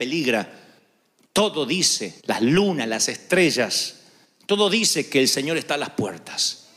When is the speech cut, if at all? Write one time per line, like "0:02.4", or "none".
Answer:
0:02.2